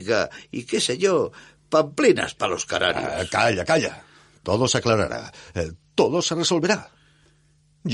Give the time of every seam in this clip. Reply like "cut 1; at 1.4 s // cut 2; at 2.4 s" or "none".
none